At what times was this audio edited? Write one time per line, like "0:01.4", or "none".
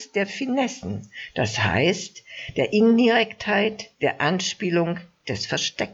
none